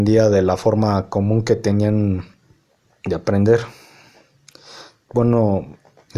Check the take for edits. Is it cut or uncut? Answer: uncut